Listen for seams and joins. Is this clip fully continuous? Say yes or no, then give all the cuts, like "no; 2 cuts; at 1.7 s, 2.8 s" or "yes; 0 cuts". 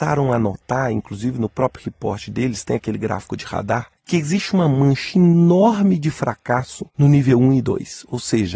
no; 2 cuts; at 4.0 s, 6.9 s